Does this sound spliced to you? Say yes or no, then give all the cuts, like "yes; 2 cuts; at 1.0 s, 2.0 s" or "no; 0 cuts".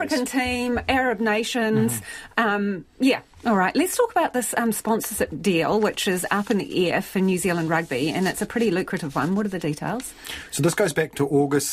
yes; 1 cut; at 3.3 s